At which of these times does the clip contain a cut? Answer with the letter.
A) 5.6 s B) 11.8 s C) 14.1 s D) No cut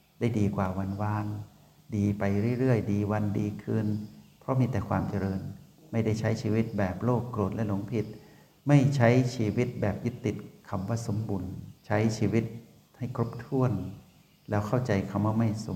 B